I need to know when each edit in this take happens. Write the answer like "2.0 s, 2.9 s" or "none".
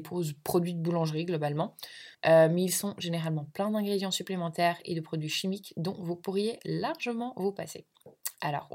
2.1 s

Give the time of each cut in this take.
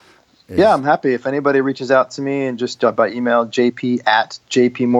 none

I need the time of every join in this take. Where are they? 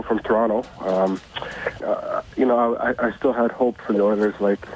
1.8 s

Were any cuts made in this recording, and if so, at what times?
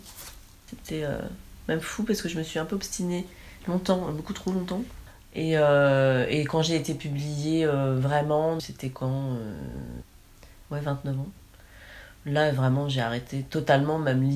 8.6 s

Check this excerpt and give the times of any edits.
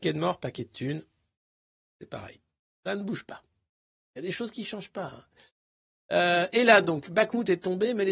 none

